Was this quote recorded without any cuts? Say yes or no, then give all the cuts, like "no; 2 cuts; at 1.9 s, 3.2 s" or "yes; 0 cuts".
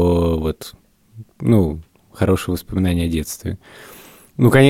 yes; 0 cuts